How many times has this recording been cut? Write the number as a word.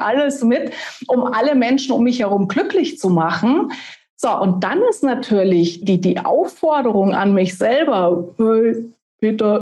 one